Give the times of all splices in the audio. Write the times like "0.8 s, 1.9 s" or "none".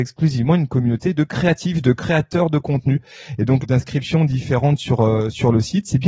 3.6 s